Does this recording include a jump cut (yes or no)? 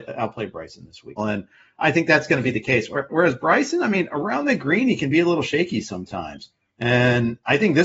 yes